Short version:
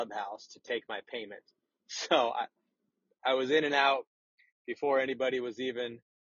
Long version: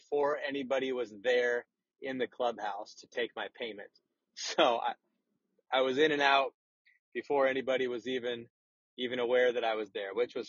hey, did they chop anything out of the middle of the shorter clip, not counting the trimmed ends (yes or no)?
no